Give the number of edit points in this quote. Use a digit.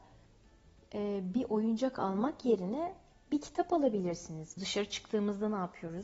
1